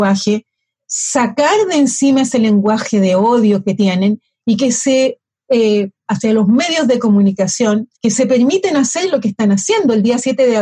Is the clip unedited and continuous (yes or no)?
no